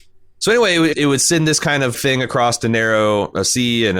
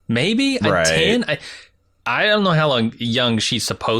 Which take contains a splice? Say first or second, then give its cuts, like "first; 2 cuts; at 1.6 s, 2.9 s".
first; 2 cuts; at 0.9 s, 1.9 s